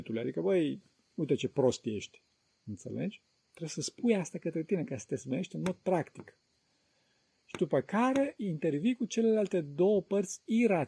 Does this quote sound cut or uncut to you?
uncut